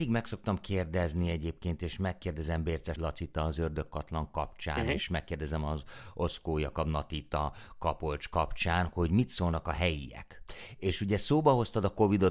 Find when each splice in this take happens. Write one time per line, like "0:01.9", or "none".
none